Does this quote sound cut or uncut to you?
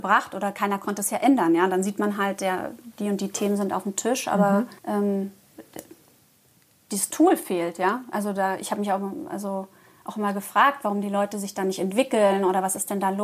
cut